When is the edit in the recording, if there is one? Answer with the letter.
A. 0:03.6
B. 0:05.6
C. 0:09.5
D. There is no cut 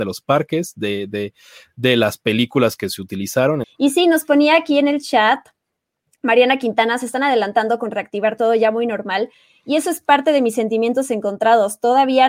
A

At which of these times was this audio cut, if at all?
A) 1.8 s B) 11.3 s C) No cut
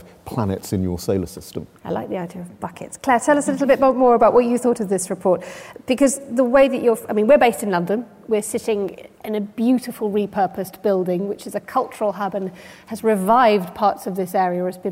A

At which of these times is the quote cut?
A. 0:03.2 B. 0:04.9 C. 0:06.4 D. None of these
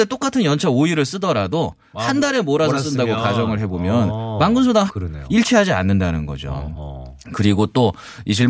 B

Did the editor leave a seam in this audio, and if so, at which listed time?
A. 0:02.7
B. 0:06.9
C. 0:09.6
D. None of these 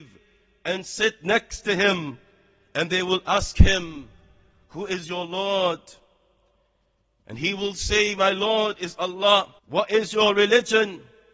C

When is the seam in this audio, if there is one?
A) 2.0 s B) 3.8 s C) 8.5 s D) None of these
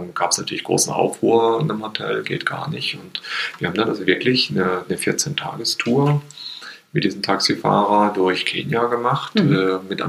D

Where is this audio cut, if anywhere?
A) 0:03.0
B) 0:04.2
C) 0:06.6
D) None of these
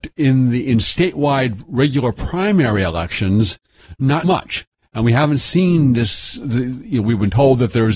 B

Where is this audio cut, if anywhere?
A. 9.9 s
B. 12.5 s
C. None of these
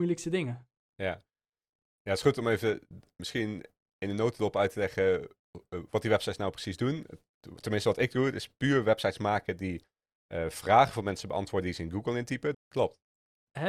B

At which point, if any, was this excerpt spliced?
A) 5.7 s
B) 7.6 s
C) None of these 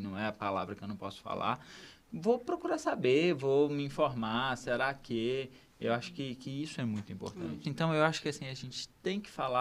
B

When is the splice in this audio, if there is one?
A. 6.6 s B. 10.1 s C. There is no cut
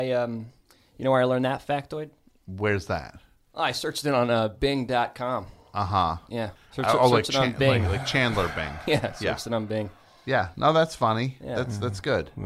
A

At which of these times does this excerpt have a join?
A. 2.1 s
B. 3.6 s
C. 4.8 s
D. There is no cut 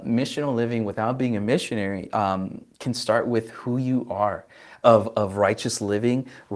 C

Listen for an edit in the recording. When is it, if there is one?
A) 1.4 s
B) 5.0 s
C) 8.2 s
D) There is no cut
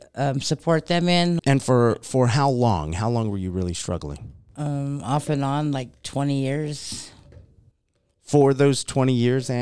A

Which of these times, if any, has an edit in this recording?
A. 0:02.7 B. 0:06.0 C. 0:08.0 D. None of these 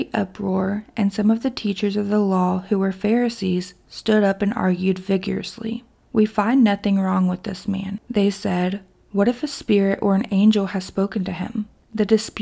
D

